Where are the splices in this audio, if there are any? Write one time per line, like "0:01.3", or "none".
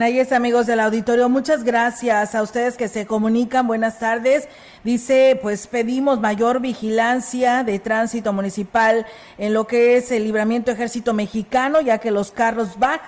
none

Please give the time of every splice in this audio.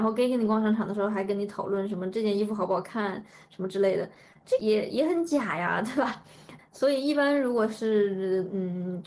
0:04.6
0:06.6

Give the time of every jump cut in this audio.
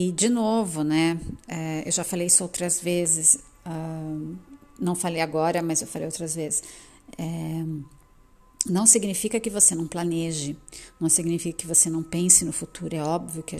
none

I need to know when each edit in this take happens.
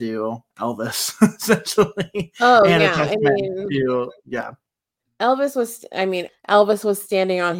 0:06.3

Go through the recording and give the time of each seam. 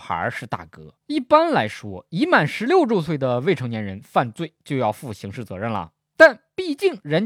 0:01.0

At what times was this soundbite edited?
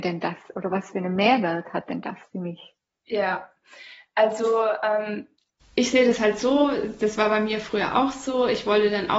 none

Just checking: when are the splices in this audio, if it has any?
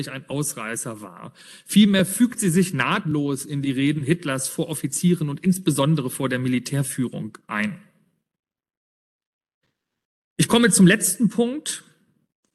none

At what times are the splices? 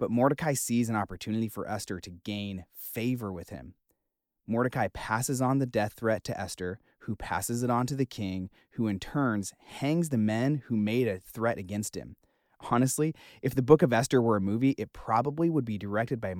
none

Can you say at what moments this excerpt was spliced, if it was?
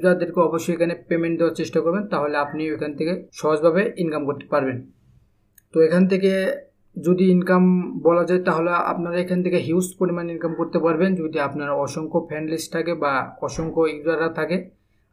0:03.3

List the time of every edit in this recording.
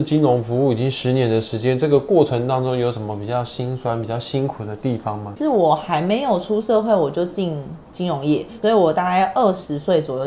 none

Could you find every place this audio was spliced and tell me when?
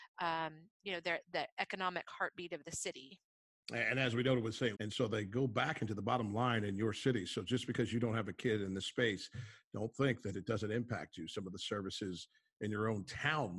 0:04.7

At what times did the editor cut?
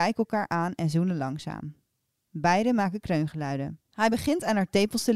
0:03.8

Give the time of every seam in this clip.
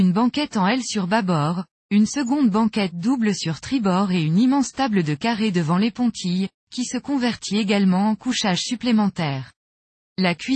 none

